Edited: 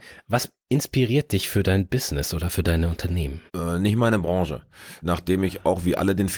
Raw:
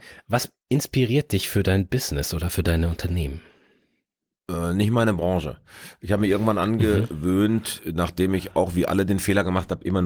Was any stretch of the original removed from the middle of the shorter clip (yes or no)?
yes